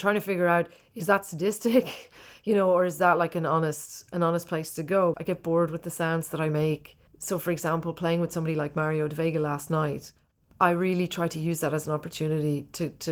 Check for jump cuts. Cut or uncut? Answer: cut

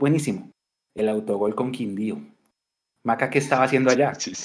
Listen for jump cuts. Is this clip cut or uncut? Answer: cut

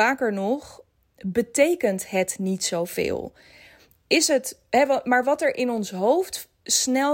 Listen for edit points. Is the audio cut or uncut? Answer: uncut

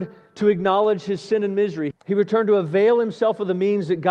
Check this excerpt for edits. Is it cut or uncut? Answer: cut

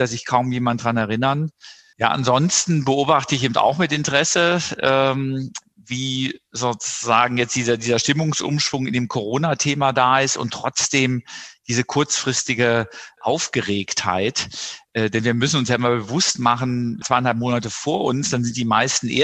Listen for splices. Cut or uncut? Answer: cut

